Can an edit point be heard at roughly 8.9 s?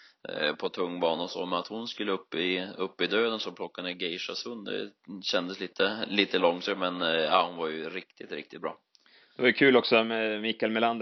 no; 0 cuts

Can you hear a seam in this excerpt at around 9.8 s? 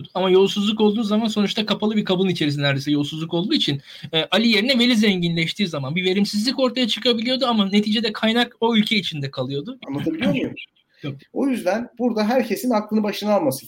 yes; 2 cuts; at 9.8 s, 11.2 s

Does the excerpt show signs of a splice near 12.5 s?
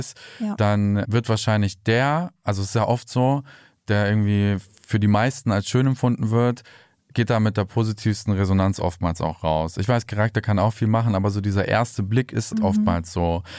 yes; 1 cut; at 12.5 s

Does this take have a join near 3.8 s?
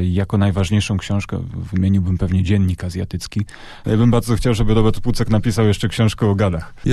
yes; 1 cut; at 3.8 s

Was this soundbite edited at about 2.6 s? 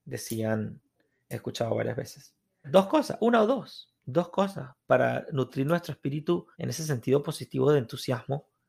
yes; 3 cuts; at 2.6 s, 4.0 s, 6.5 s

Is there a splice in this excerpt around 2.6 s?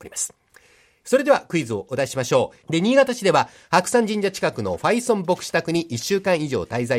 yes; 1 cut; at 2.6 s

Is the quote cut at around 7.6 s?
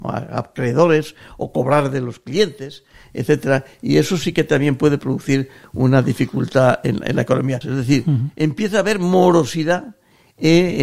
yes; 1 cut; at 7.6 s

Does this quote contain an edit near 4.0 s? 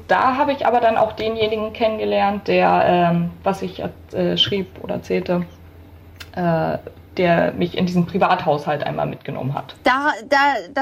no; 0 cuts

